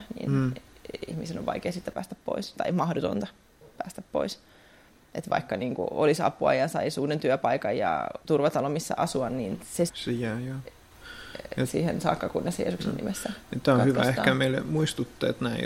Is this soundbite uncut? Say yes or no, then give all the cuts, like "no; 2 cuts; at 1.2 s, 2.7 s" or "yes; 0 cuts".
no; 1 cut; at 9.9 s